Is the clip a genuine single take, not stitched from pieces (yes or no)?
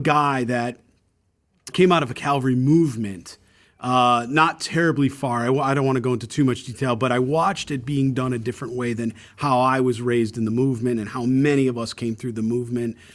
no